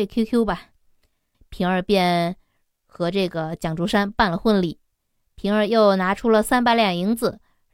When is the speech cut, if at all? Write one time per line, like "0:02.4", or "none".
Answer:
0:01.3